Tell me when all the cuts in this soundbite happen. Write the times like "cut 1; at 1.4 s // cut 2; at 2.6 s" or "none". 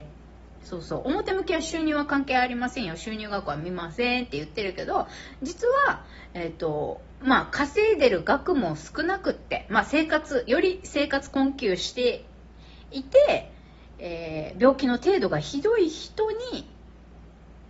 none